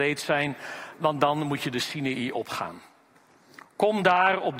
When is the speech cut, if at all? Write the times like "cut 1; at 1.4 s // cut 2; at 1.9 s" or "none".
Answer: none